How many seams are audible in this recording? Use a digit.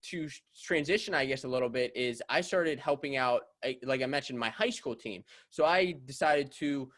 0